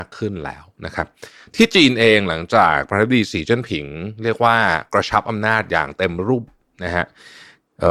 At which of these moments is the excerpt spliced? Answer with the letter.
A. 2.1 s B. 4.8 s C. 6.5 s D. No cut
C